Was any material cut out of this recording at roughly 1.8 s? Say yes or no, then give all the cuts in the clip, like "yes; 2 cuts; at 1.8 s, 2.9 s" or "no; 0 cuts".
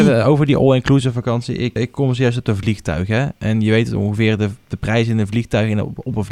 yes; 1 cut; at 1.8 s